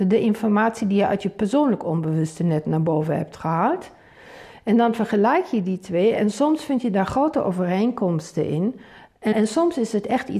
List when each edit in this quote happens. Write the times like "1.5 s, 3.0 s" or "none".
9.3 s